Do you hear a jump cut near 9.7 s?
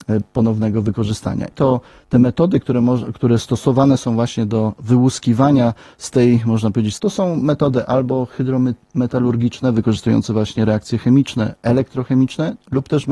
no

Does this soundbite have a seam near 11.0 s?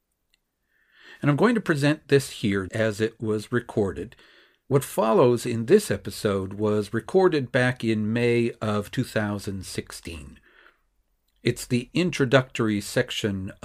no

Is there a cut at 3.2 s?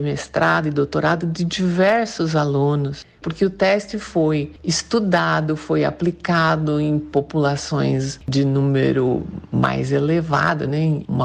yes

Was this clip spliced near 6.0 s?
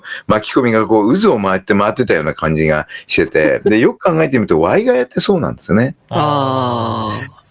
yes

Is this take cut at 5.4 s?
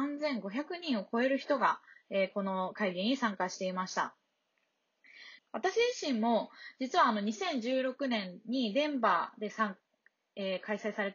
yes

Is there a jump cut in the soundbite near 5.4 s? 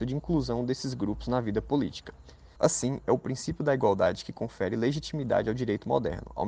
no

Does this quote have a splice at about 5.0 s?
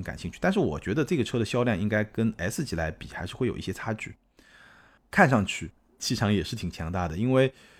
yes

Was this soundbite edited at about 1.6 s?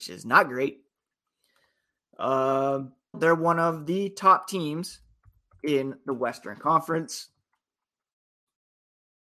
no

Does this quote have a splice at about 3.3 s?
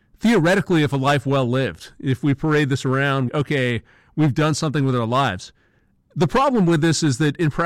yes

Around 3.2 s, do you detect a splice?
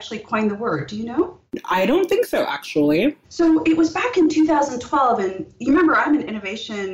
yes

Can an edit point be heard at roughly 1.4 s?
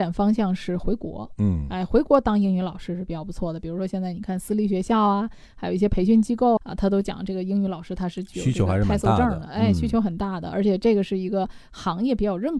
no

